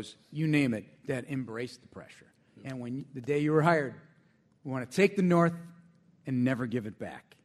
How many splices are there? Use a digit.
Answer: 0